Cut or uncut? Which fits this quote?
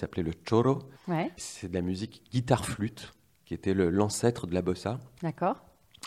cut